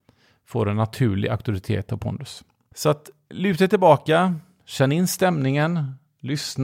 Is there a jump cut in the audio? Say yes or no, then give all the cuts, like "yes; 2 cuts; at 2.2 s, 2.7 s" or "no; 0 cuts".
yes; 1 cut; at 2.7 s